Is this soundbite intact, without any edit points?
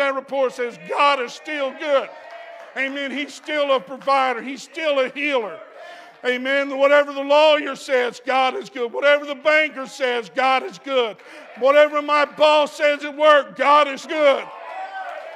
no; 1 cut; at 14.0 s

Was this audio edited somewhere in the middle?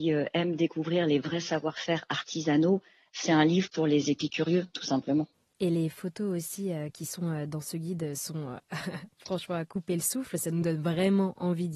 no; 0 cuts

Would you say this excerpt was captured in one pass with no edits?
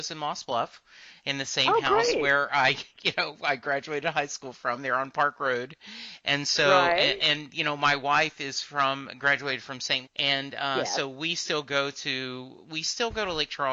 no; 1 cut; at 10.0 s

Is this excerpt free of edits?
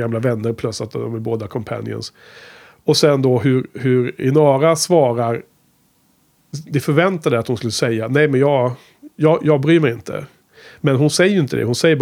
yes; 0 cuts

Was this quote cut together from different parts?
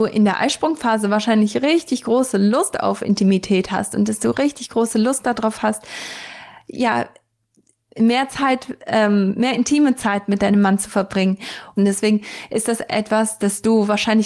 yes; 1 cut; at 11.8 s

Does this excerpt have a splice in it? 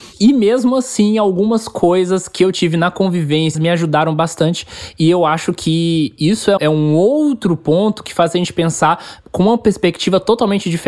yes; 2 cuts; at 3.5 s, 6.6 s

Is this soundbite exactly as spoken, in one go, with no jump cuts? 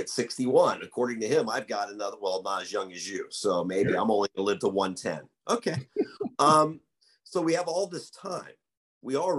yes; 0 cuts

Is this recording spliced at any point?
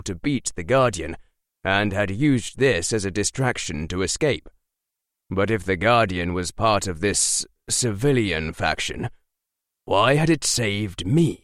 no; 0 cuts

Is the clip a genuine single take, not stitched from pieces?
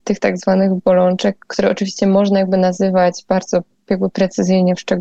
no; 1 cut; at 1.4 s

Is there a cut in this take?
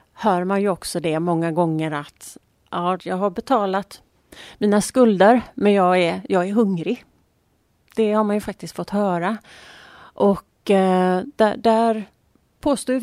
yes; 1 cut; at 3.0 s

